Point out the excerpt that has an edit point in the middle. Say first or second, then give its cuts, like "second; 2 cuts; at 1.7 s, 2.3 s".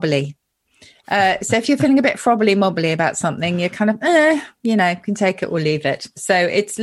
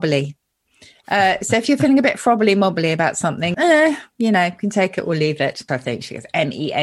second; 2 cuts; at 3.5 s, 5.7 s